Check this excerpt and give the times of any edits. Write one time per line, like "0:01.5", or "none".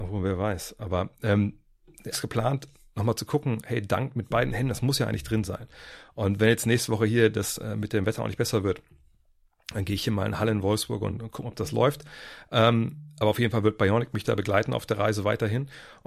0:02.1